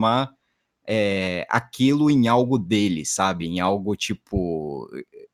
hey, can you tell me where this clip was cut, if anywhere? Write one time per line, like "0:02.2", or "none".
none

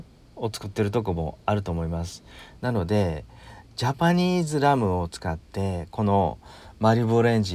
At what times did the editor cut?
0:02.6

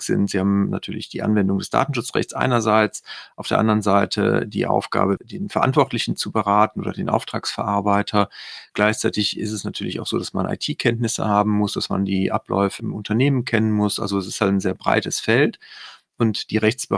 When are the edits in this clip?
0:05.2
0:12.8

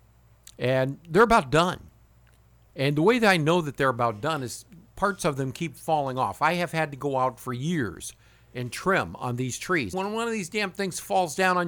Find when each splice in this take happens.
0:09.9

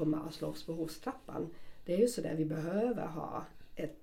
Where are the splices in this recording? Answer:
none

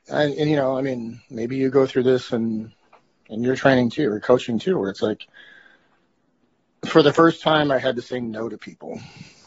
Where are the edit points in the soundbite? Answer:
none

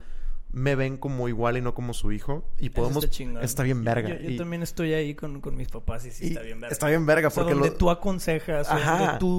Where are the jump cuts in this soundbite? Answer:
none

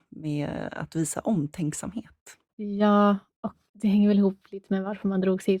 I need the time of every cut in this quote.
0:02.5
0:03.7

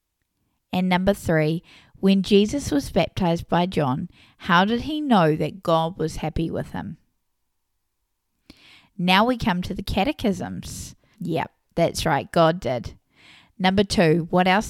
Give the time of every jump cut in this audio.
0:11.1

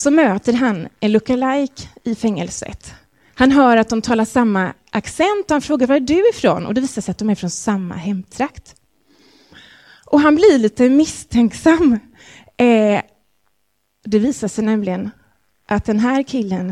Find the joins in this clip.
none

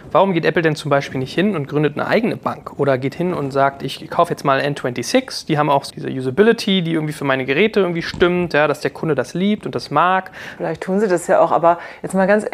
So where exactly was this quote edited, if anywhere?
0:05.9
0:10.6

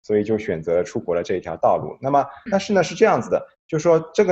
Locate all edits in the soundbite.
0:02.5

